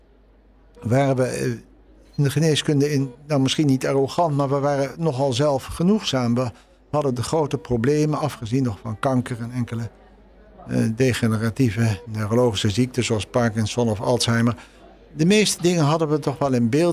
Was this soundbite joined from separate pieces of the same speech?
no; 0 cuts

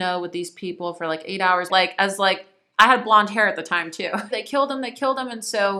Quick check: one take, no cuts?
no; 2 cuts; at 1.7 s, 4.3 s

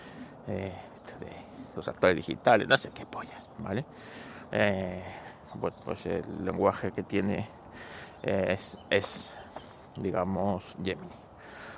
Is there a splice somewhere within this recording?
yes; 1 cut; at 4.5 s

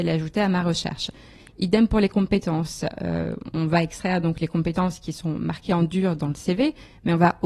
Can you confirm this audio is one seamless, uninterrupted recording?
yes; 0 cuts

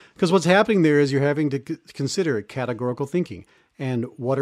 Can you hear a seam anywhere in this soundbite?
no; 0 cuts

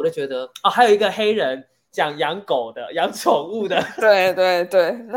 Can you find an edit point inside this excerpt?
no; 0 cuts

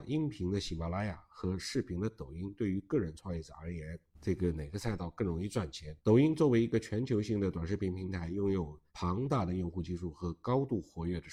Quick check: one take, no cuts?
no; 2 cuts; at 6.0 s, 8.9 s

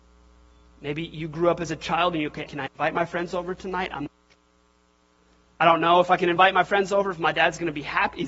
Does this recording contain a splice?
yes; 1 cut; at 2.5 s

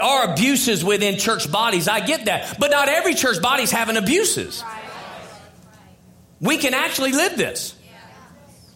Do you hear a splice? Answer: no; 0 cuts

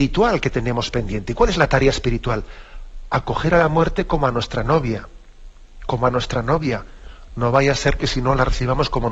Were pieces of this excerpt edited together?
no; 0 cuts

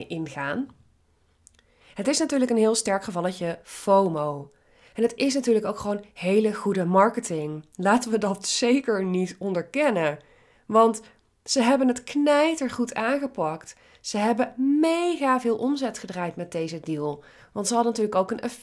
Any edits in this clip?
no; 0 cuts

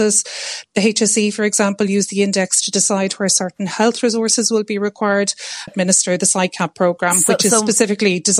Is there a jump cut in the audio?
yes; 1 cut; at 5.7 s

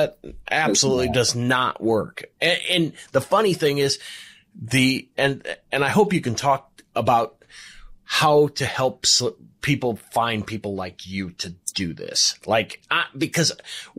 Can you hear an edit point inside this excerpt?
no; 0 cuts

